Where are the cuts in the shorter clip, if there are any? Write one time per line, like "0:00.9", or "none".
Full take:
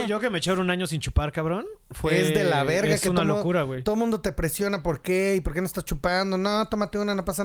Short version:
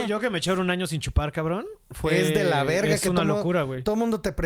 none